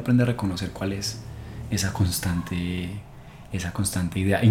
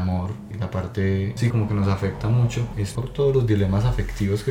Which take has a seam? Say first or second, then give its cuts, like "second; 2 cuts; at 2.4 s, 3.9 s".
second; 1 cut; at 1.5 s